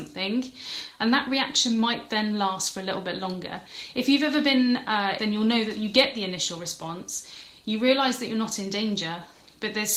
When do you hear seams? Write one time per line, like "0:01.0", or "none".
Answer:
0:05.2